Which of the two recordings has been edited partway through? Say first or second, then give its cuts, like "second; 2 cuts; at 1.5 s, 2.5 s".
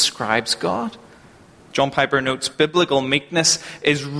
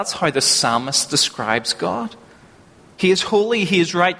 first; 1 cut; at 1.7 s